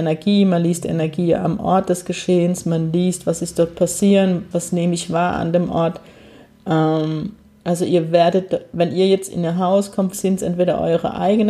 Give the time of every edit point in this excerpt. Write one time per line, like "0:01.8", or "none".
0:04.5
0:10.1